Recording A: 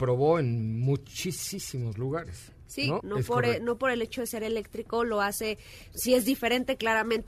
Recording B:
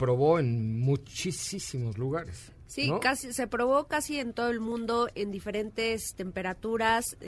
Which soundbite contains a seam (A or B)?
A